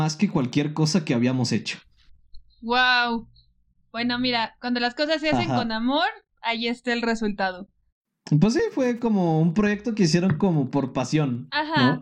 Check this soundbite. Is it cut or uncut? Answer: uncut